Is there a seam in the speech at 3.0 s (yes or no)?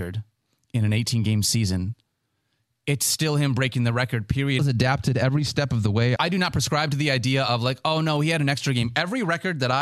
no